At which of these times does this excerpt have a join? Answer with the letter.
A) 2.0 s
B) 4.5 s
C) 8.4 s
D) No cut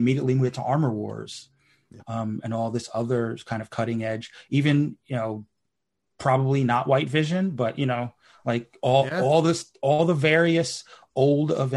A